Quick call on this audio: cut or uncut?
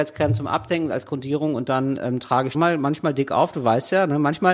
cut